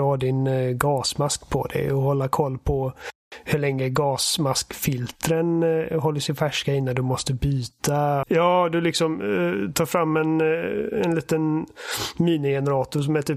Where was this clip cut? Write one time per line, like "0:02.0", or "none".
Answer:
0:08.2